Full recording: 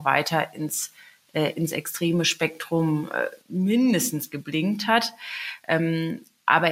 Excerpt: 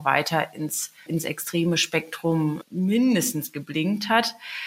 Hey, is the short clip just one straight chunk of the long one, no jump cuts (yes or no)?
no